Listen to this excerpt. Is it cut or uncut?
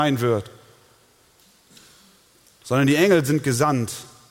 uncut